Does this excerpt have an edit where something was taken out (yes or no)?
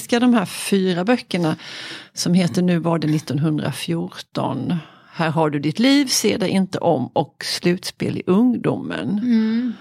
no